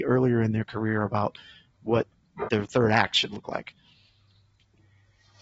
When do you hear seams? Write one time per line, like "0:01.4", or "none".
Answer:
0:02.5

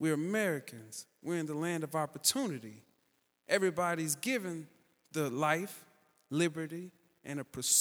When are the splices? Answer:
none

